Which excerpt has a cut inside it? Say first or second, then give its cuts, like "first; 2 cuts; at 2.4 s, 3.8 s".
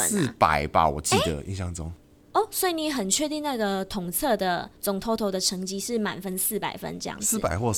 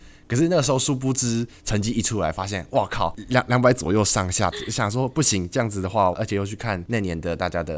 second; 2 cuts; at 4.5 s, 6.1 s